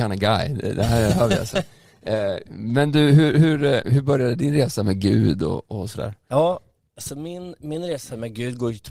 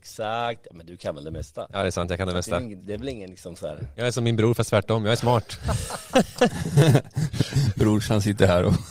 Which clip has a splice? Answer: second; 1 cut; at 2.8 s

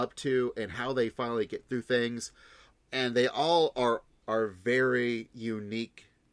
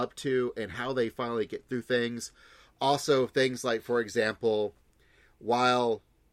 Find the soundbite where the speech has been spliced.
first; 2 cuts; at 2.7 s, 4.2 s

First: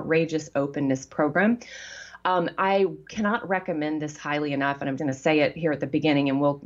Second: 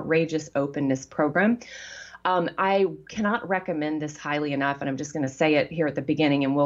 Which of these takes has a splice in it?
first; 1 cut; at 5.0 s

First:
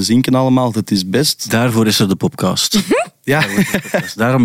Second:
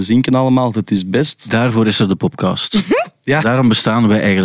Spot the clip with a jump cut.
second; 1 cut; at 3.4 s

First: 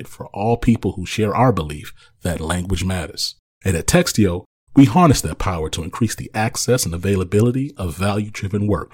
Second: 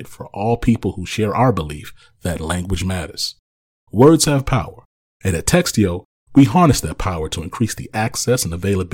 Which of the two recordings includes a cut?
first; 1 cut; at 3.5 s

